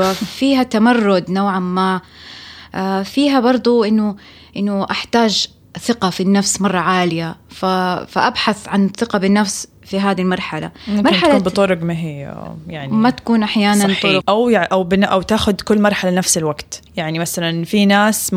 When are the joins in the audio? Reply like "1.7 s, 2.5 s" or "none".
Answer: 14.2 s, 16.9 s